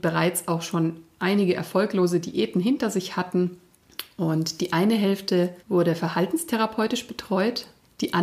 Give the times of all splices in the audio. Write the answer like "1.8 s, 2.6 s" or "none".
5.6 s